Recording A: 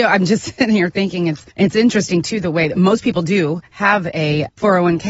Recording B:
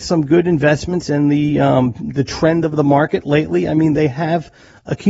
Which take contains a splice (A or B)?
A